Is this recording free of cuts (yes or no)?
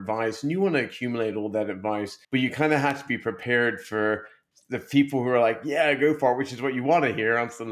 no